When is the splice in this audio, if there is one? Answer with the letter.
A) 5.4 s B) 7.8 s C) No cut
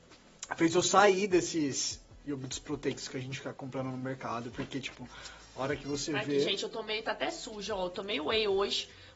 C